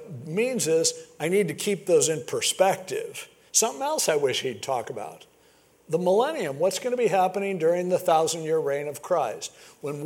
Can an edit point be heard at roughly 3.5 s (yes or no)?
yes